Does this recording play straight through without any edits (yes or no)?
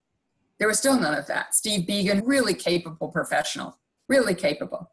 no